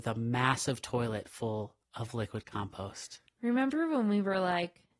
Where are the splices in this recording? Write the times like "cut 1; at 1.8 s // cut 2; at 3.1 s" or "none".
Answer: cut 1; at 1.8 s